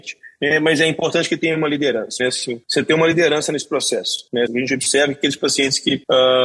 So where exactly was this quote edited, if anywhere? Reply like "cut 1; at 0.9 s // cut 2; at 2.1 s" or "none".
cut 1; at 2.2 s // cut 2; at 4.5 s